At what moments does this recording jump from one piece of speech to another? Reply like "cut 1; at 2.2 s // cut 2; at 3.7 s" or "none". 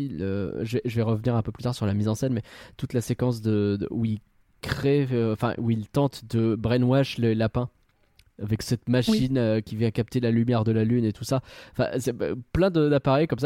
none